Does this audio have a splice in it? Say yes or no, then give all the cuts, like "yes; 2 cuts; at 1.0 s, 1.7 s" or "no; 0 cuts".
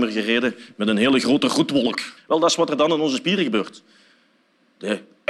yes; 1 cut; at 2.2 s